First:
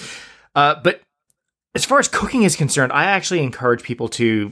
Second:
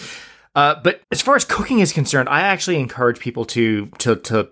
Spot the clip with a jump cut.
second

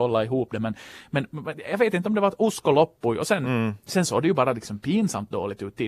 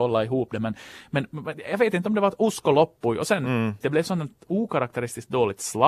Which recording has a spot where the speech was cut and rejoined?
second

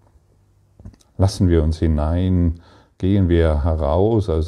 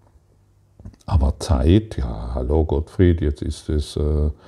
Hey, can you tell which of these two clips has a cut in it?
first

